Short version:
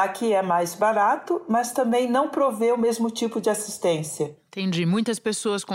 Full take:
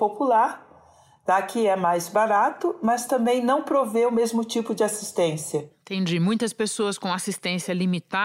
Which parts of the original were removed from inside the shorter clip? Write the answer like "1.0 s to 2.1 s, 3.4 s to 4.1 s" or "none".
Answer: none